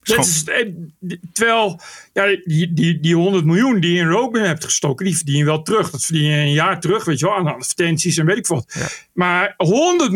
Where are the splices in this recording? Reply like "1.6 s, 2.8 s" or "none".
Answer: none

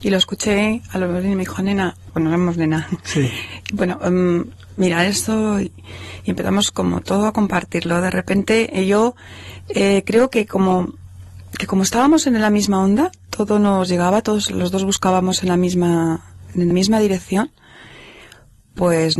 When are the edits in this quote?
2.1 s, 16.7 s

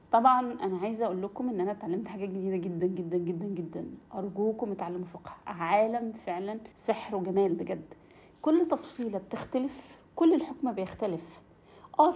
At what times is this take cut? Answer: 2.8 s, 6.7 s

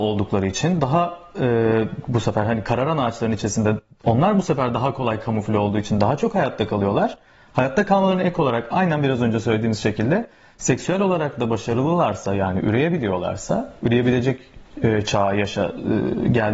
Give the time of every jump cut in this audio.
none

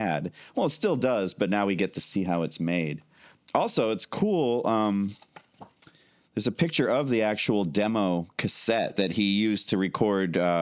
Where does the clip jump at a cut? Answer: none

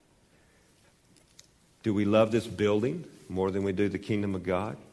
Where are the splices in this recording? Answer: none

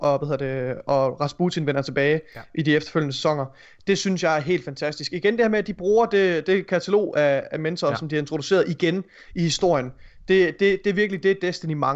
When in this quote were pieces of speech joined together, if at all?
none

